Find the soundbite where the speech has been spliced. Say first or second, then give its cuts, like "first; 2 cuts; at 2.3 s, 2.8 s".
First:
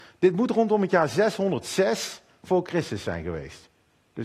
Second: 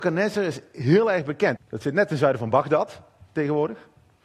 second; 1 cut; at 1.6 s